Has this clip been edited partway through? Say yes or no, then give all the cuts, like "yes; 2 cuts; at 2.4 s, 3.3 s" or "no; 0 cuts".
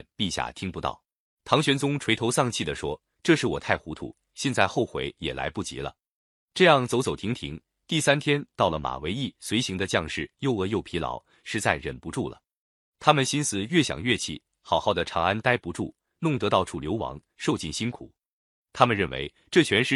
yes; 1 cut; at 1.3 s